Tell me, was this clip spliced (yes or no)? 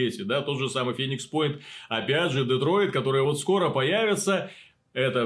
no